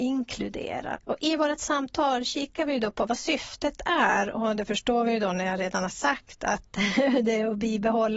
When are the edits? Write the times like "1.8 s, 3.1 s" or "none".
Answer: 0.9 s